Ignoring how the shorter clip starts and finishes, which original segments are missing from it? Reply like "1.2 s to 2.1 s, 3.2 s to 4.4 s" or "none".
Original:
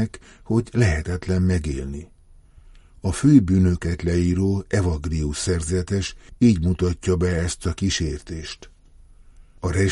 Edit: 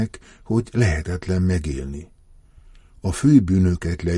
none